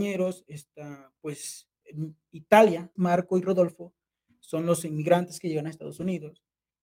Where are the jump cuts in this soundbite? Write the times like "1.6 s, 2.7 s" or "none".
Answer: 3.0 s

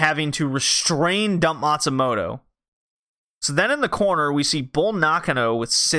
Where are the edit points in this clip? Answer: none

